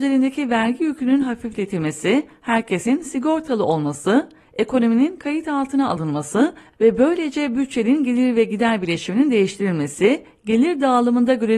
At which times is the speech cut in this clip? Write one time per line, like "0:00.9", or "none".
none